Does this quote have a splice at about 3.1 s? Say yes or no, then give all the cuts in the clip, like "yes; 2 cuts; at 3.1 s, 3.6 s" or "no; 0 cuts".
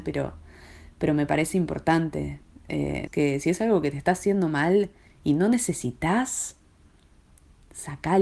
yes; 1 cut; at 3.1 s